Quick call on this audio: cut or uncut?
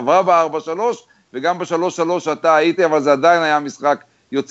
cut